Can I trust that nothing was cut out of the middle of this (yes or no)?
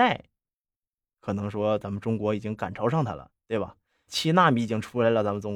no